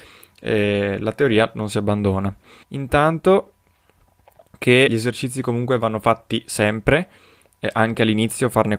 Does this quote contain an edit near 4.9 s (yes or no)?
yes